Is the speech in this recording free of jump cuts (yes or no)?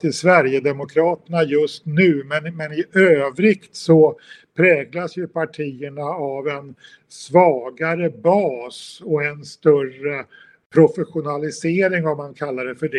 yes